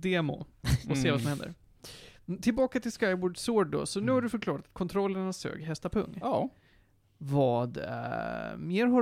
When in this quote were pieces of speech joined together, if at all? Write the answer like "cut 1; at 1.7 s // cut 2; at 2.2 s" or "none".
none

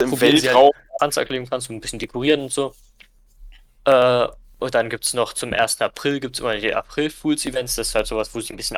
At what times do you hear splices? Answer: cut 1; at 1.0 s

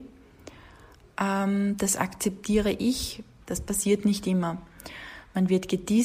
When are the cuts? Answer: cut 1; at 3.4 s

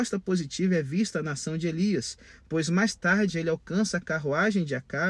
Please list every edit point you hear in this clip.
none

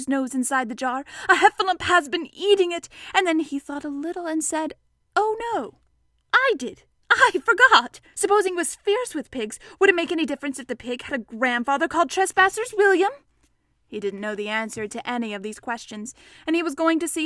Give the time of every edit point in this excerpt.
cut 1; at 8.1 s

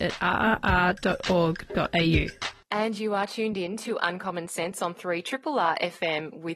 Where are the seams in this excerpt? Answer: cut 1; at 2.6 s

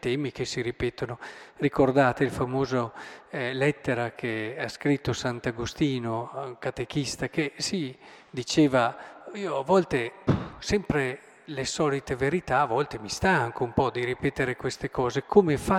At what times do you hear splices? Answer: none

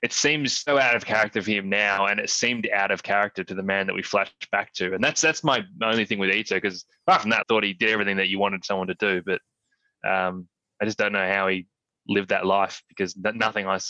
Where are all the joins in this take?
cut 1; at 7.4 s

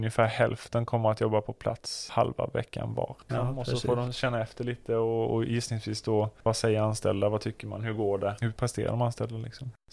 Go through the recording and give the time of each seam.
cut 1; at 3.3 s

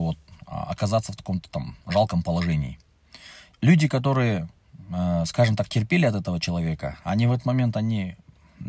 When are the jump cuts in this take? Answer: cut 1; at 3.5 s

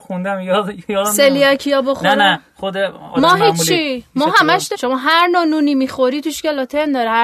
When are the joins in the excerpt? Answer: cut 1; at 4.7 s

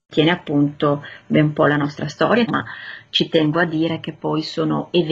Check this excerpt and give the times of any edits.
cut 1; at 2.5 s

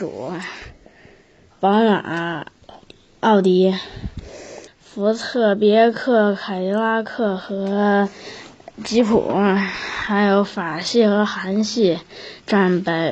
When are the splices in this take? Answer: cut 1; at 1.5 s // cut 2; at 4.7 s

